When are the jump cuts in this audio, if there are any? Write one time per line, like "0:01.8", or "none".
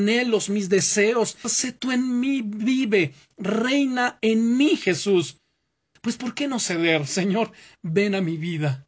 0:01.4
0:06.0

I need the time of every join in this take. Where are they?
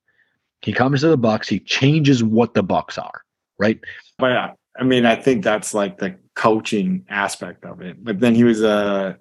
0:04.2

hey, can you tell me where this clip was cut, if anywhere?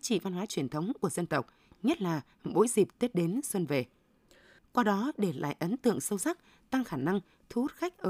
0:04.6

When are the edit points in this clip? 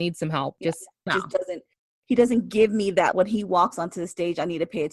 0:01.1
0:03.1

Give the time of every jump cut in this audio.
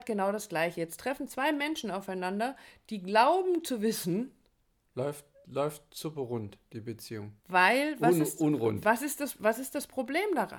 0:04.8
0:07.4

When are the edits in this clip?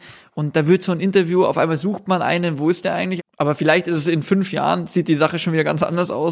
0:03.2

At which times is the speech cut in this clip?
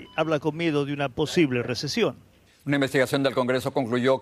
0:02.5

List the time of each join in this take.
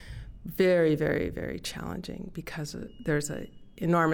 none

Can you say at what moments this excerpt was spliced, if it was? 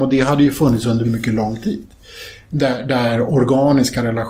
0:01.0

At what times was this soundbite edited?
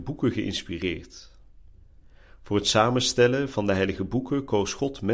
none

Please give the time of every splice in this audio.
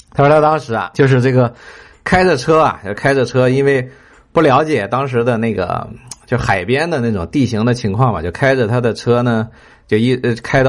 none

